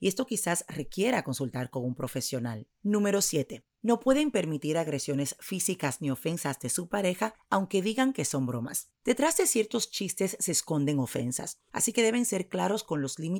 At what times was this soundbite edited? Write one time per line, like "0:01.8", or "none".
0:02.7